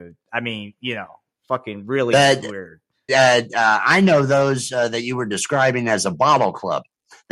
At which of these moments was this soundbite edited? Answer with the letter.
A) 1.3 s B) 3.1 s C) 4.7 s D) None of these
B